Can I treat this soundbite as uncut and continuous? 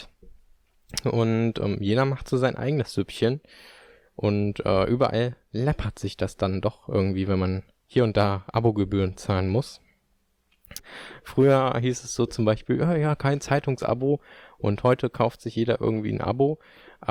no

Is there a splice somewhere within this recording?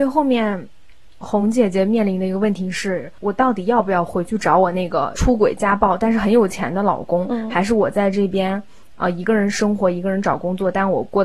no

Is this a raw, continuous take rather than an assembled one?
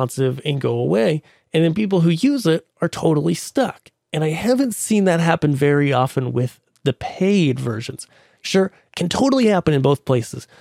no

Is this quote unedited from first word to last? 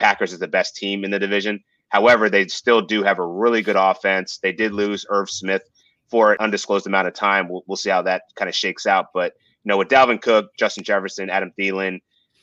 yes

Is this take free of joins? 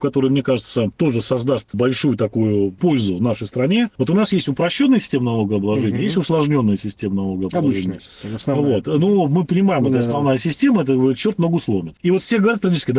yes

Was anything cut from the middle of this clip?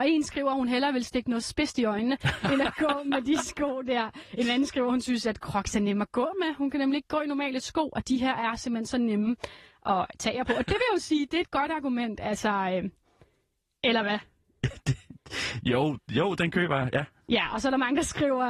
no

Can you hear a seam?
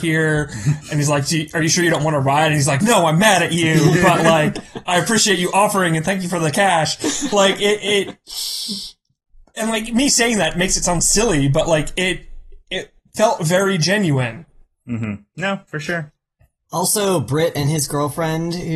no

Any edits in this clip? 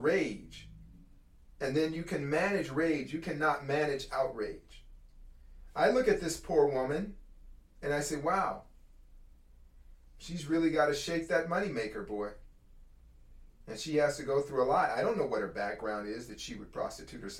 no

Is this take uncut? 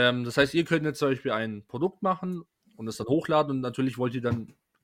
yes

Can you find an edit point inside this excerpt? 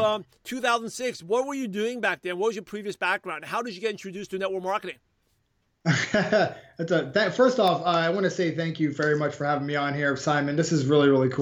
no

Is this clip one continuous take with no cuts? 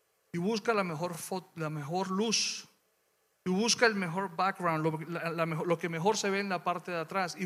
yes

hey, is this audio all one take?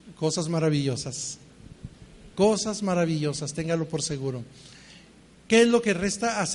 yes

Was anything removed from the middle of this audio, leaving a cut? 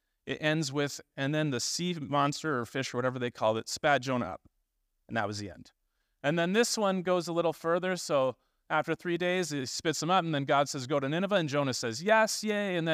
no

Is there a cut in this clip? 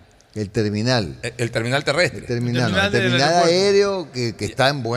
no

